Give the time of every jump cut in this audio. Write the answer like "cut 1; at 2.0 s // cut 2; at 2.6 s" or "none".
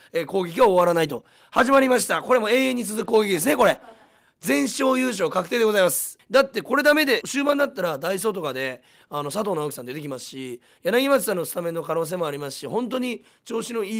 cut 1; at 6.2 s // cut 2; at 7.2 s